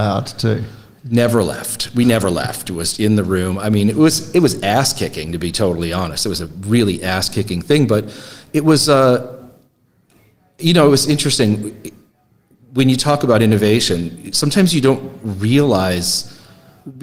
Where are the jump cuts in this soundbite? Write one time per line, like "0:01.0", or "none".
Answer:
0:02.9

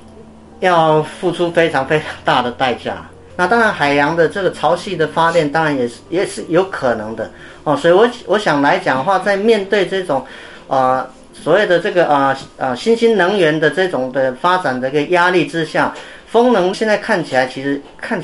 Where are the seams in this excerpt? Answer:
0:03.3
0:16.7

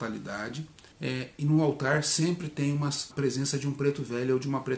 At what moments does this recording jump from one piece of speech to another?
0:00.9
0:03.1

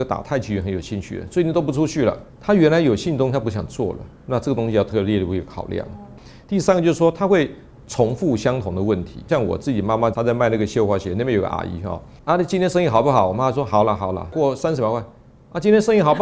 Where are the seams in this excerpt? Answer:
0:02.3

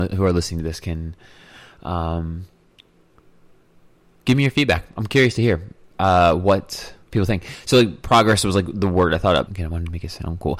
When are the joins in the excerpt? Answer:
0:07.0
0:09.5

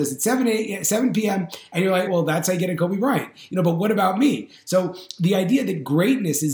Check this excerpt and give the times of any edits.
0:02.1

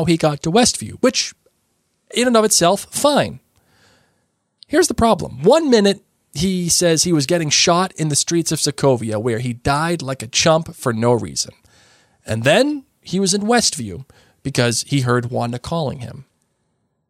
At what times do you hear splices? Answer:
none

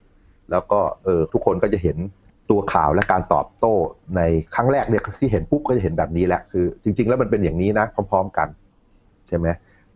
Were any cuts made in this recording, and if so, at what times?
0:04.5

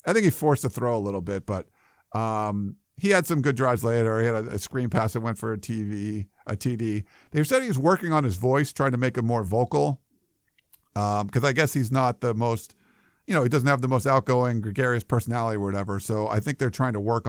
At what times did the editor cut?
none

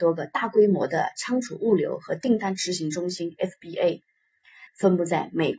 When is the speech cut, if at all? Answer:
0:04.7

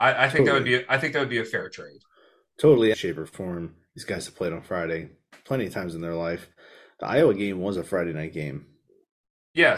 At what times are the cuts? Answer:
0:02.9

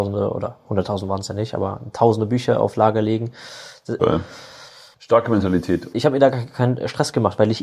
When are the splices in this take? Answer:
0:04.0
0:05.9

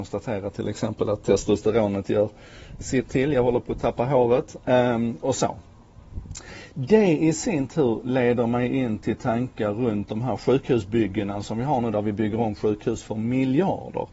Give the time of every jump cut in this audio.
none

